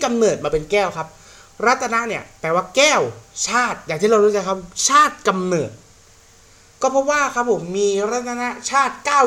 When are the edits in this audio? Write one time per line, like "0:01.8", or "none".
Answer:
none